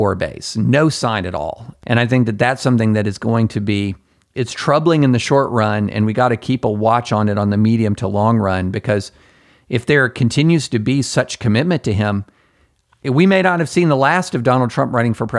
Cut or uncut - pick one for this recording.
uncut